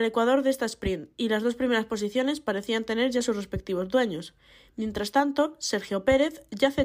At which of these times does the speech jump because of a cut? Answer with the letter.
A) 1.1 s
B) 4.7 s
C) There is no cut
C